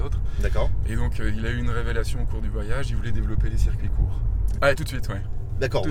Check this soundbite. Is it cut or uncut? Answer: cut